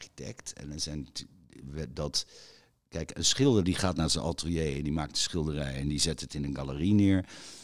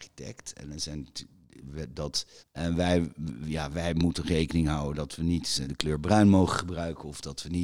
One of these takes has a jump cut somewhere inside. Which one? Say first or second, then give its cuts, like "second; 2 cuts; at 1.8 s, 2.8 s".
second; 2 cuts; at 2.4 s, 5.6 s